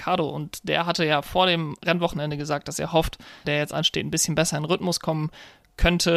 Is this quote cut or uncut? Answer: cut